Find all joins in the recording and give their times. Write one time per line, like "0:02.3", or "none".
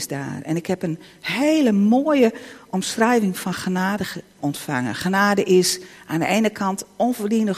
0:04.4